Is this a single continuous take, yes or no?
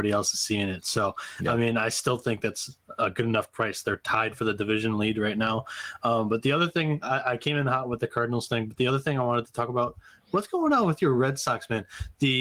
yes